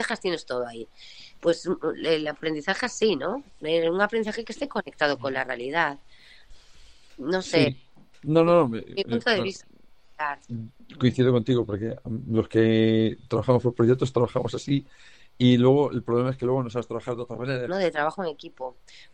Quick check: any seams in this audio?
yes; 1 cut; at 17.7 s

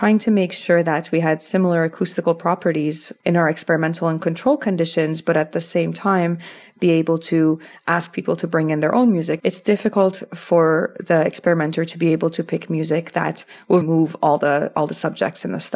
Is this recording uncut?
no; 2 cuts; at 9.4 s, 13.8 s

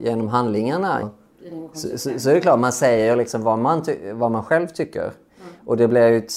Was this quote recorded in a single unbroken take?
no; 1 cut; at 1.0 s

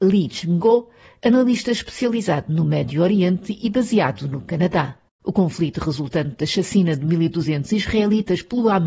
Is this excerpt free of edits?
no; 1 cut; at 5.2 s

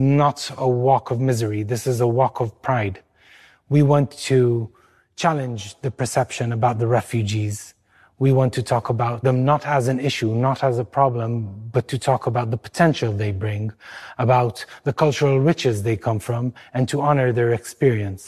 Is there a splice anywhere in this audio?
no; 0 cuts

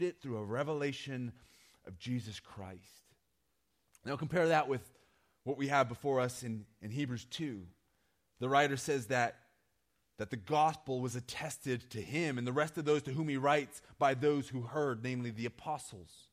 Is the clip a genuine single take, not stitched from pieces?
yes; 0 cuts

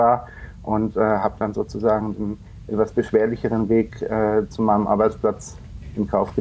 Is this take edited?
no; 0 cuts

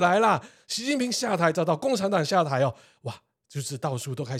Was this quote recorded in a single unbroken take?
yes; 0 cuts

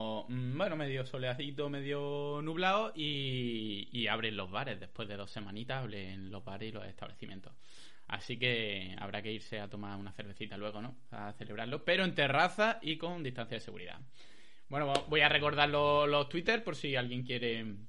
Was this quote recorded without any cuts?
yes; 0 cuts

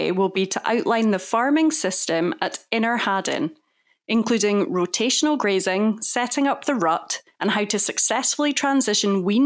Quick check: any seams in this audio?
yes; 1 cut; at 7.3 s

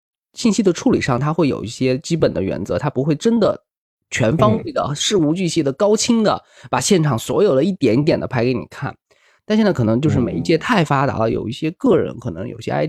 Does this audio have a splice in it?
no; 0 cuts

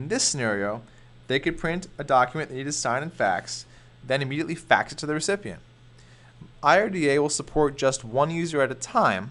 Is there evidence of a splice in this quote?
yes; 1 cut; at 6.5 s

